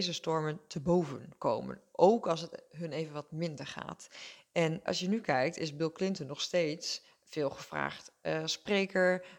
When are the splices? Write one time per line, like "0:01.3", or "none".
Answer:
0:04.9

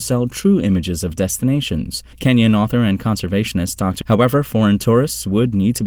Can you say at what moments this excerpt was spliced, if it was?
0:02.1
0:04.0

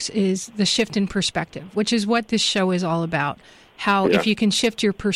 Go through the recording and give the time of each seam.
none

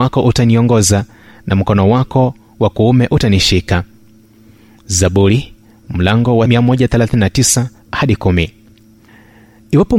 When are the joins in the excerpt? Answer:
0:07.8

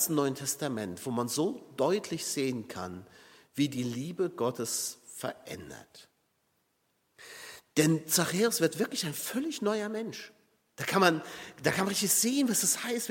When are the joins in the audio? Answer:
none

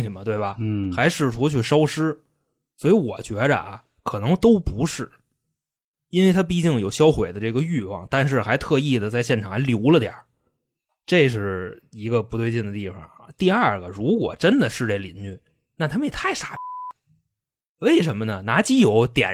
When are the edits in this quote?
0:16.1

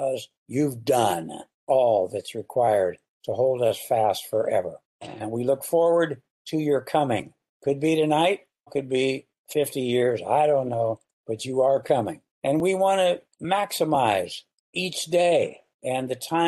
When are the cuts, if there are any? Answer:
0:08.7

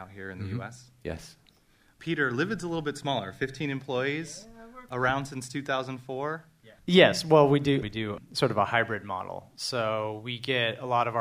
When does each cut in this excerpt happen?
0:06.8
0:07.8

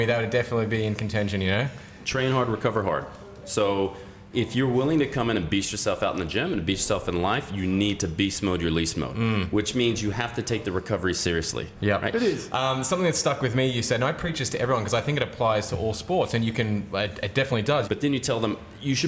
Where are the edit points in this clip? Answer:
0:12.1
0:17.8

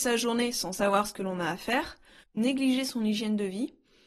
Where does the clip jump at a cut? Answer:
0:02.2

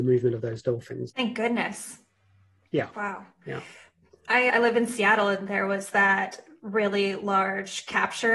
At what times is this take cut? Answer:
0:01.1

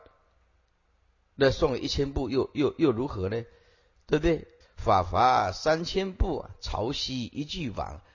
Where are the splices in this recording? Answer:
0:04.6

